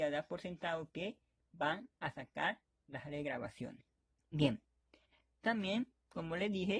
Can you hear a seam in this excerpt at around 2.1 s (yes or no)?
no